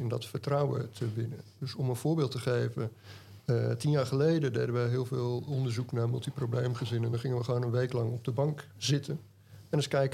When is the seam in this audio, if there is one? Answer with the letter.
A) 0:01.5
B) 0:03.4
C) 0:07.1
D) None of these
D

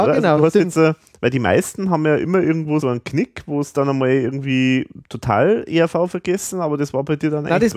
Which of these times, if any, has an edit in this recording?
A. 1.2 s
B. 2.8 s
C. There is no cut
B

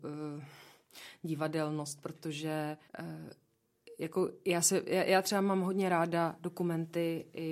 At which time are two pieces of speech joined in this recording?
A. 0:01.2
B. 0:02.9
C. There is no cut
B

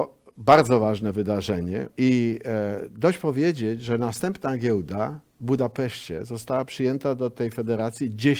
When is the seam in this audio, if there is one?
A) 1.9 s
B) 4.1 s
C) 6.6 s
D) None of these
A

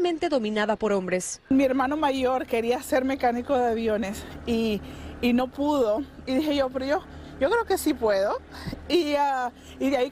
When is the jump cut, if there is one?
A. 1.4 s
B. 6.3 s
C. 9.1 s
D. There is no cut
D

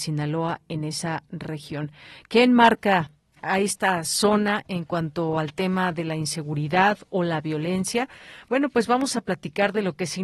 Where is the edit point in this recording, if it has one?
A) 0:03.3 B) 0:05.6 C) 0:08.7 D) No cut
A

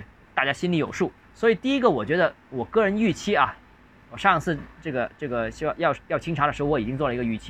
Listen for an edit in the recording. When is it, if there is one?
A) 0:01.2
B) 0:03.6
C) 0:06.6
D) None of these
A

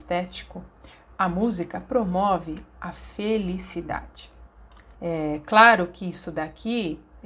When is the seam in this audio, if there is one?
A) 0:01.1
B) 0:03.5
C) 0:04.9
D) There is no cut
C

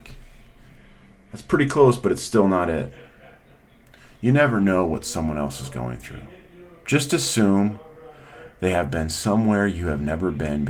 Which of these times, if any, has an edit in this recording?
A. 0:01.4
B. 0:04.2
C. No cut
C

